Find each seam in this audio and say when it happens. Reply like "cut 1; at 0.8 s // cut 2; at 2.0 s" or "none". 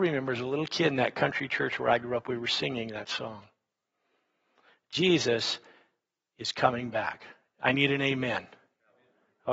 none